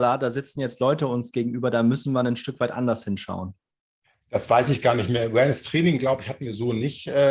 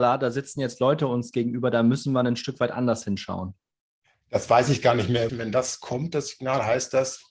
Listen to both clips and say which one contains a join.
second; 1 cut; at 5.3 s

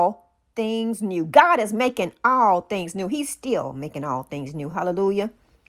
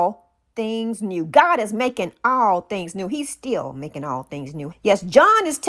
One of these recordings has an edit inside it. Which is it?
second; 1 cut; at 4.7 s

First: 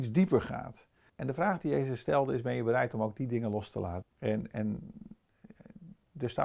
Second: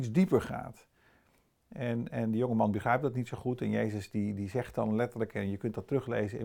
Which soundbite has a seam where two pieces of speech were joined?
first; 2 cuts; at 1.1 s, 4.0 s

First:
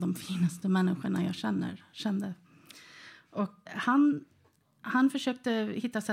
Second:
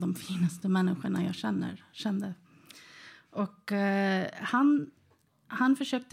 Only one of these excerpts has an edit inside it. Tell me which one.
first; 1 cut; at 3.7 s

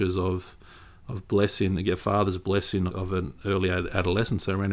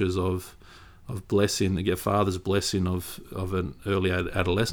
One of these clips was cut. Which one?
first; 1 cut; at 2.9 s

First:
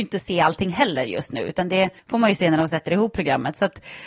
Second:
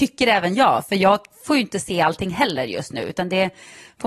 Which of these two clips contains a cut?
first; 1 cut; at 2.0 s

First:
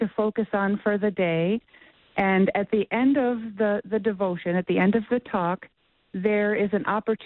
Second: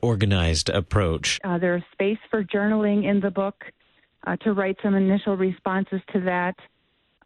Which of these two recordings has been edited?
second; 1 cut; at 1.4 s

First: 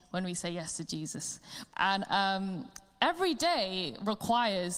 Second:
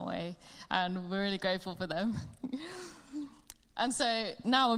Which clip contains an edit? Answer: first; 1 cut; at 1.7 s

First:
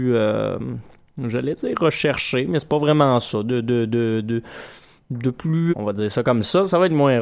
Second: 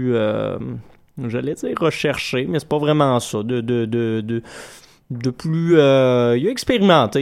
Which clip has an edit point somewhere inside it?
first; 1 cut; at 5.7 s

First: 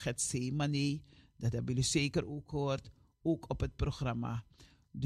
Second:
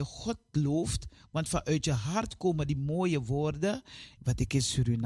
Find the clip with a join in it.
second; 1 cut; at 4.2 s

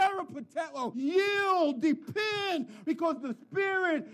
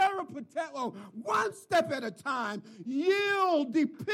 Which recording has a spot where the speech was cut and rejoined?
first; 2 cuts; at 0.9 s, 2.8 s

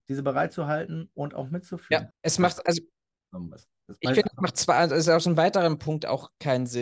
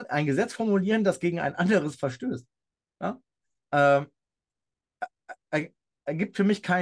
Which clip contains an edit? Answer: first; 1 cut; at 2.1 s

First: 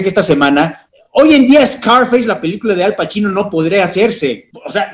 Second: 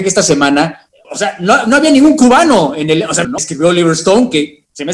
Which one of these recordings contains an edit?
second; 2 cuts; at 1.0 s, 3.2 s

